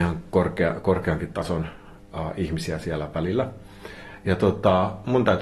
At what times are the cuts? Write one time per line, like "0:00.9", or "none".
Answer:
none